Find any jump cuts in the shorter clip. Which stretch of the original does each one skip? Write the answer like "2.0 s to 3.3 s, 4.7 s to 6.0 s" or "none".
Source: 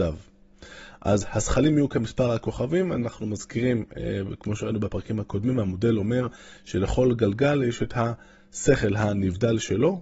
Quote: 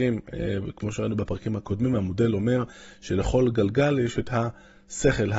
none